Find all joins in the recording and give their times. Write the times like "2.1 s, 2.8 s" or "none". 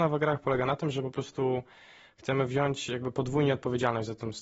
none